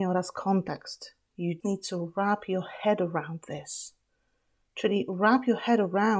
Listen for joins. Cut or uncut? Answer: cut